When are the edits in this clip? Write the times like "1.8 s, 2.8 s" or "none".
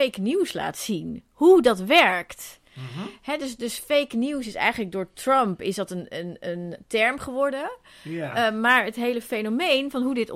none